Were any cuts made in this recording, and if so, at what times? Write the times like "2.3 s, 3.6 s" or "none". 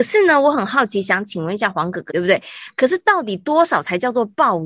2.1 s